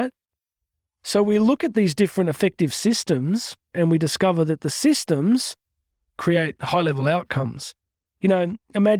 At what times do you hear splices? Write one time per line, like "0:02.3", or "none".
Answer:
0:03.7